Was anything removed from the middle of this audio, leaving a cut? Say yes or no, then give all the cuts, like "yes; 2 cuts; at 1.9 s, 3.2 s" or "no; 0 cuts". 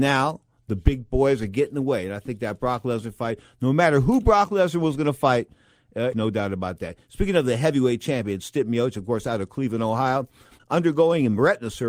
yes; 2 cuts; at 6.1 s, 10.6 s